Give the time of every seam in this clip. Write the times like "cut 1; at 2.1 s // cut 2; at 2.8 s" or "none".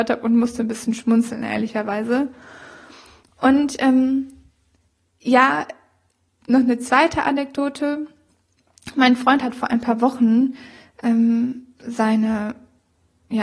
none